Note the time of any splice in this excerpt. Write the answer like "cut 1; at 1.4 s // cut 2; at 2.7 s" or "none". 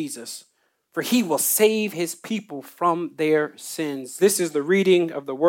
cut 1; at 4.2 s